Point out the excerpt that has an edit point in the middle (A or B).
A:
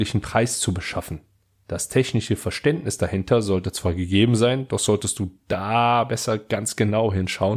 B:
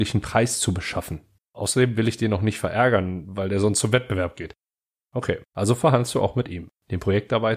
B